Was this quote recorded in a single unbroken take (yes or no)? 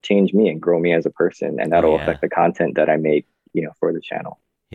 yes